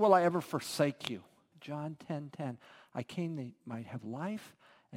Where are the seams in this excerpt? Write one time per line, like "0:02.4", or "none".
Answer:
0:01.5